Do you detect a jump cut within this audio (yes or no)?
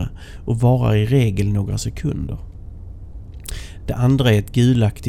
no